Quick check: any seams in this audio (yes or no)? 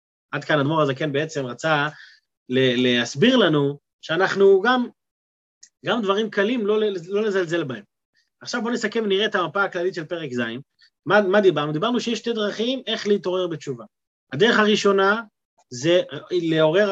no